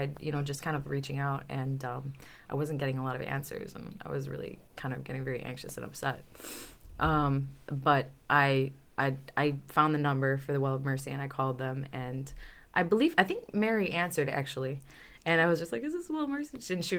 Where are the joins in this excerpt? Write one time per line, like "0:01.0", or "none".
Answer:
none